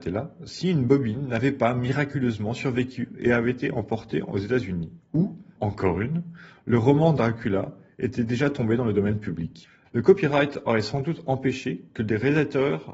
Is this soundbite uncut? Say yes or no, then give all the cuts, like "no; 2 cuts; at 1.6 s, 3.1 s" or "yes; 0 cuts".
no; 2 cuts; at 5.6 s, 9.9 s